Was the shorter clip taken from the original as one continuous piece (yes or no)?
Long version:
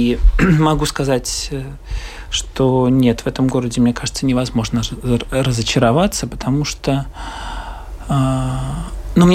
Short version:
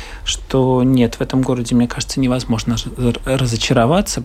yes